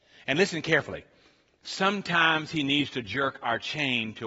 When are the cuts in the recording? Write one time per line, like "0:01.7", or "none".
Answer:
none